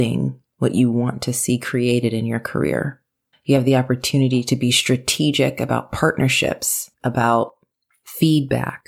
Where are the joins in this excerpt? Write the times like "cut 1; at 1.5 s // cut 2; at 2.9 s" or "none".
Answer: cut 1; at 3.3 s // cut 2; at 6.9 s